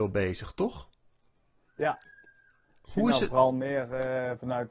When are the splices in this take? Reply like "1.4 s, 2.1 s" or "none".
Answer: none